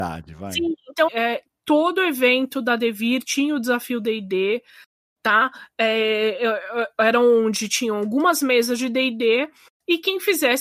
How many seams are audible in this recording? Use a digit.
1